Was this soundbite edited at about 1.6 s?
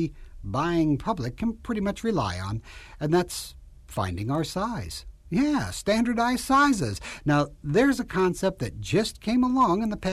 no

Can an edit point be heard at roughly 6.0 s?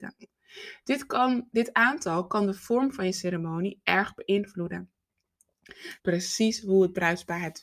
yes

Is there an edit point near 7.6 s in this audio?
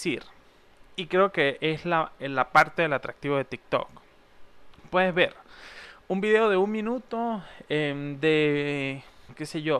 no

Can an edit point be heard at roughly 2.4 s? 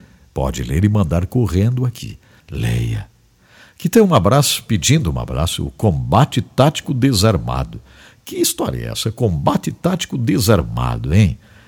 yes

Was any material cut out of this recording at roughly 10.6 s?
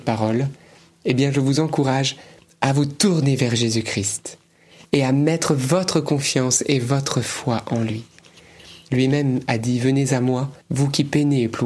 yes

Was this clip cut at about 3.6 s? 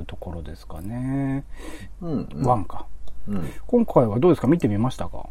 no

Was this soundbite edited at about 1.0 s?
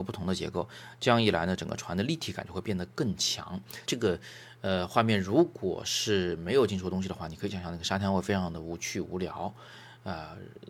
no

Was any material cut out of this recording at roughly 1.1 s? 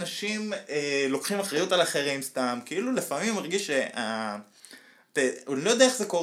no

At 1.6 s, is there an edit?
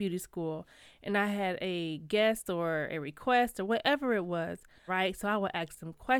no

